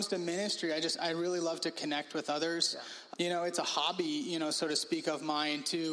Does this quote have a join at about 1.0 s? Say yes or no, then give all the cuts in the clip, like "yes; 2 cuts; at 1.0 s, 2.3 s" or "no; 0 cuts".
no; 1 cut; at 3.1 s